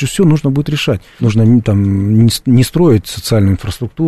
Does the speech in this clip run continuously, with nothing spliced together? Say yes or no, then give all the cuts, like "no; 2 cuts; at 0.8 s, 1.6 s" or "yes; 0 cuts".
no; 1 cut; at 1.2 s